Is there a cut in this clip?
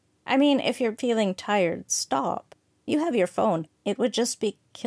yes; 1 cut; at 3.8 s

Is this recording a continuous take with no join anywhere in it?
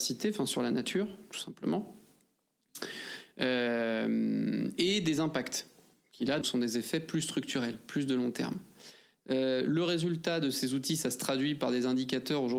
no; 2 cuts; at 6.4 s, 9.1 s

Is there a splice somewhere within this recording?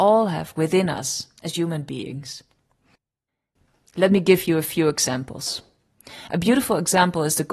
no; 0 cuts

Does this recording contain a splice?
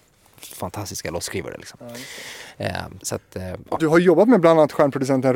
yes; 1 cut; at 3.0 s

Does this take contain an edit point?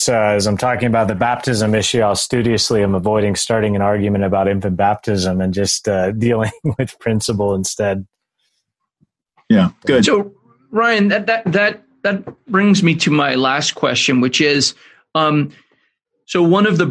no; 0 cuts

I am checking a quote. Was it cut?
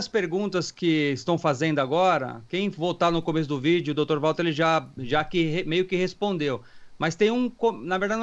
yes; 1 cut; at 5.0 s

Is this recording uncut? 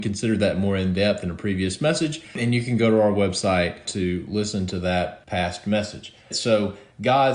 no; 1 cut; at 6.3 s

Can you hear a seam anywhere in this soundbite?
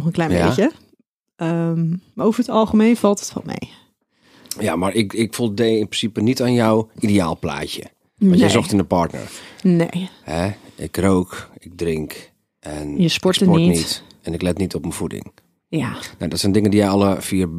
no; 0 cuts

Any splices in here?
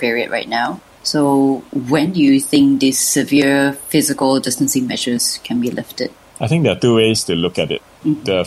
no; 0 cuts

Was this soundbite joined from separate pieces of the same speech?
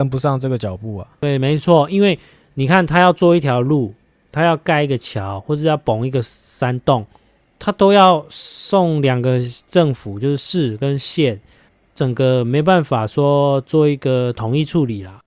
no; 0 cuts

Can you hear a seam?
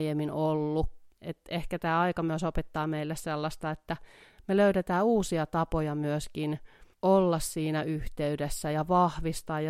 yes; 2 cuts; at 1.1 s, 6.9 s

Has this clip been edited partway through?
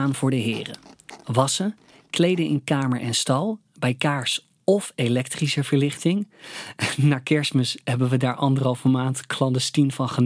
no; 0 cuts

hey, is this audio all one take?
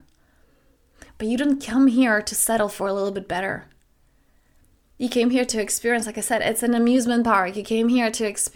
yes; 0 cuts

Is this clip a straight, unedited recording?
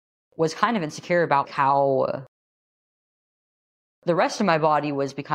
no; 1 cut; at 1.4 s

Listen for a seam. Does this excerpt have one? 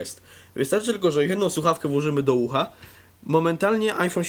no; 0 cuts

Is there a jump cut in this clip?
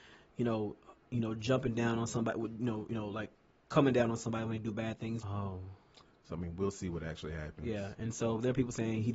yes; 1 cut; at 5.2 s

